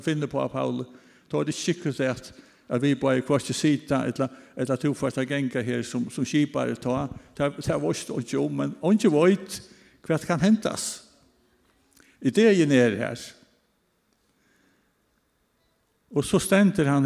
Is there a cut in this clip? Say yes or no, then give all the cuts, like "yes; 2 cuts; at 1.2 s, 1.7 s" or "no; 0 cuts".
no; 0 cuts